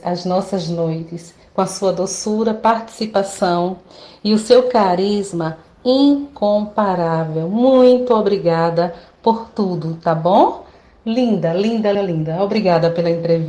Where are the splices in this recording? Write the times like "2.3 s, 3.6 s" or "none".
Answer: 11.9 s